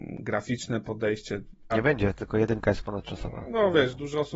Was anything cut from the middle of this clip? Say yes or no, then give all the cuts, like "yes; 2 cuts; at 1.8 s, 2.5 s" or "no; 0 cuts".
yes; 1 cut; at 1.7 s